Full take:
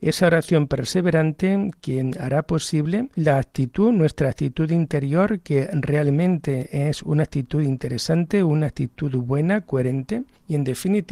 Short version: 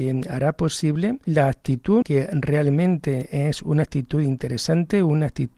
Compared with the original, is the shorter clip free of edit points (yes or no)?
no